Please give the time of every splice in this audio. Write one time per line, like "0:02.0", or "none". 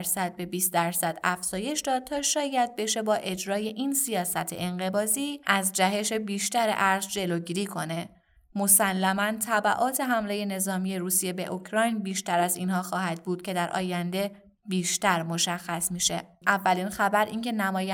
0:16.4